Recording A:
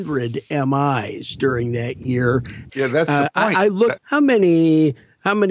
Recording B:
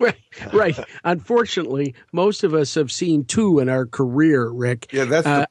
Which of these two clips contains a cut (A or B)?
A